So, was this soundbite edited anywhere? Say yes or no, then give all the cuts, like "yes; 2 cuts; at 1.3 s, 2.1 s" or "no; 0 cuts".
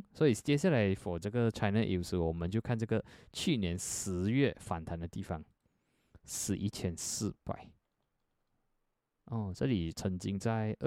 no; 0 cuts